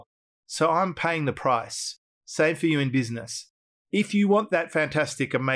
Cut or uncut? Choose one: uncut